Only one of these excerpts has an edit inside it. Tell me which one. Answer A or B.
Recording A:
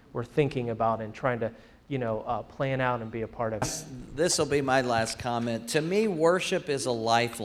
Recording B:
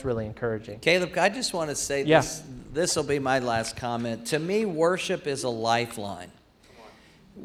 A